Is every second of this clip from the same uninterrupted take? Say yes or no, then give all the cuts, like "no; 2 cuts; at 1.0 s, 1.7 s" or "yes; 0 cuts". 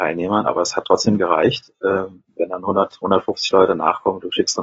yes; 0 cuts